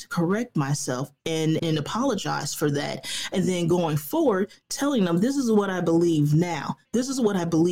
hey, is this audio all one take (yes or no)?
no